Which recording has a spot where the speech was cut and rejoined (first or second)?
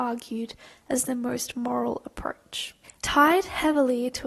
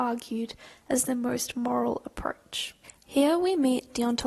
first